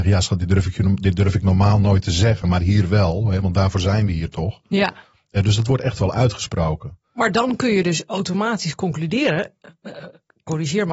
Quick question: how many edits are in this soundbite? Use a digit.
0